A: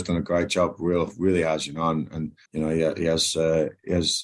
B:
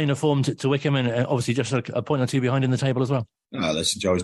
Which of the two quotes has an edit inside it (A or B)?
A